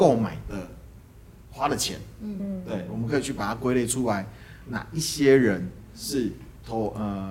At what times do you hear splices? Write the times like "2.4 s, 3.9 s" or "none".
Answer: none

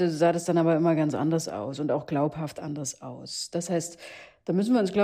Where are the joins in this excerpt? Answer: none

